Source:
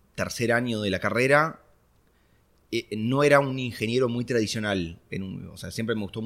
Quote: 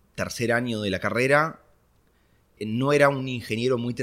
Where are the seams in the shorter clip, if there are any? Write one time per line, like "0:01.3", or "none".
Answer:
0:02.6